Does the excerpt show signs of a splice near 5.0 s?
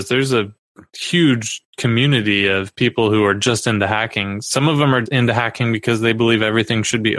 yes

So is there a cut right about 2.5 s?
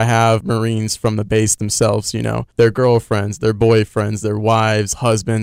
yes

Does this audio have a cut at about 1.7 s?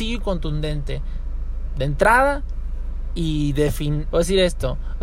no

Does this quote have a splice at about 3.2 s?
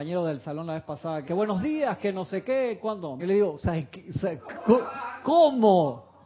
yes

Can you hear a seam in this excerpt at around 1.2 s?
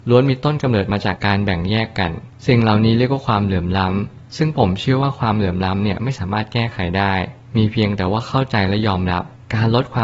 yes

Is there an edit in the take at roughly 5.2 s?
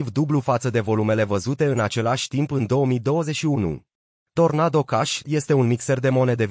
yes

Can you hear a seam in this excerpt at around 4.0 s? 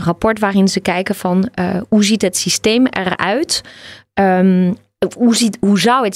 no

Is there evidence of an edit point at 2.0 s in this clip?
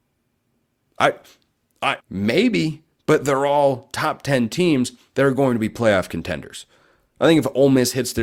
yes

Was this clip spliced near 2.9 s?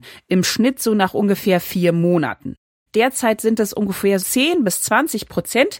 yes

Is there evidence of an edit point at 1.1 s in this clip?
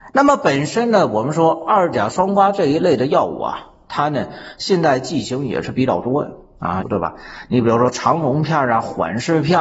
no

